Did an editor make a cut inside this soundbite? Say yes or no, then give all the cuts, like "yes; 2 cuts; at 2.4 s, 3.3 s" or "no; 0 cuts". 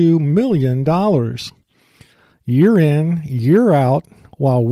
no; 0 cuts